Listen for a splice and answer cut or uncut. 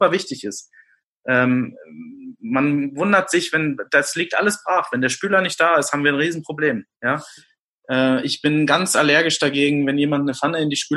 uncut